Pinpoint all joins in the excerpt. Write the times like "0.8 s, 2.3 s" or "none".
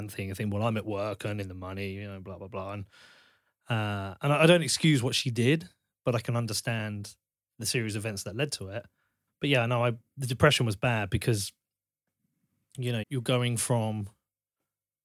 9.3 s, 13.0 s